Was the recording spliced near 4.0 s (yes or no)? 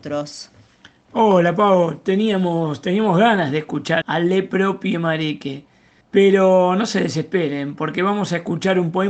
yes